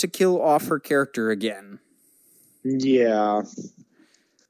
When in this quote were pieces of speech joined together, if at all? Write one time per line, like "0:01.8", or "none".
none

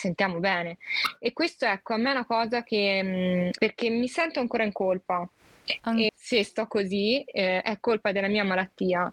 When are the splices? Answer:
0:03.6
0:06.1

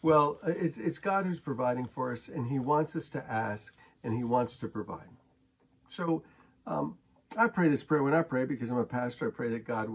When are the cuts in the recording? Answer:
none

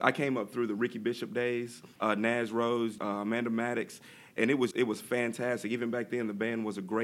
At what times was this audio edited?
0:02.0
0:03.0
0:04.7

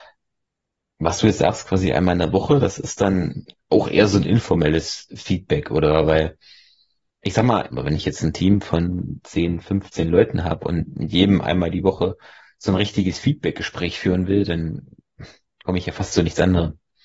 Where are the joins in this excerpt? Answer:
0:07.7

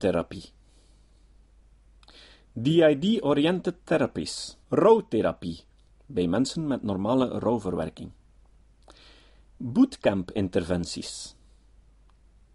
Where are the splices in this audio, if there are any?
0:04.6
0:09.5

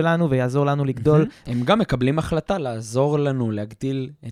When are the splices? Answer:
0:01.4

